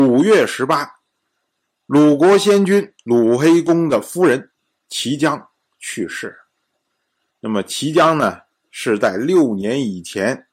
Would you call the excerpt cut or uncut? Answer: uncut